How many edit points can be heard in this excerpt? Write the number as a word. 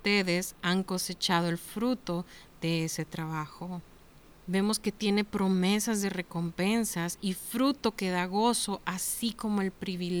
one